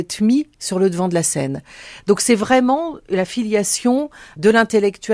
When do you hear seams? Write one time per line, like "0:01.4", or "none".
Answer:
none